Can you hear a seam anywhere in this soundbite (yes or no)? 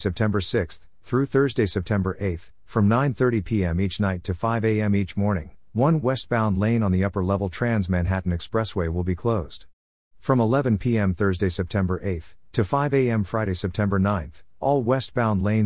no